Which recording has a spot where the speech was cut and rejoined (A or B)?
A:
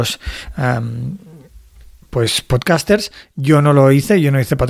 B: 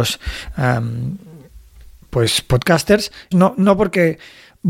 B